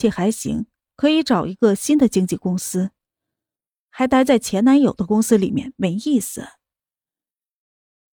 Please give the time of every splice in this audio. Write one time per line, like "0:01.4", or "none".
none